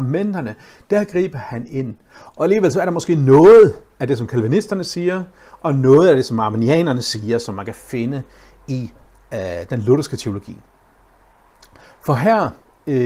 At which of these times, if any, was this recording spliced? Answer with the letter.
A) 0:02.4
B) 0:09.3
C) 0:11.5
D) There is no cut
A